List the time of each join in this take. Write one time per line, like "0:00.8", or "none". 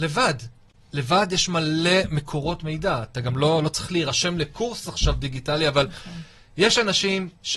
none